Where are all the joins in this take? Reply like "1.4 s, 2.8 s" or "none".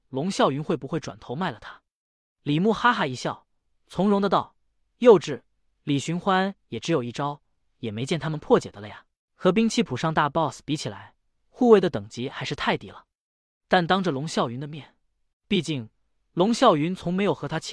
9.2 s, 15.3 s